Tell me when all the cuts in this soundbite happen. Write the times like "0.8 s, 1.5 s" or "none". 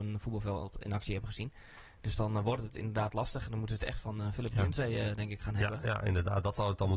none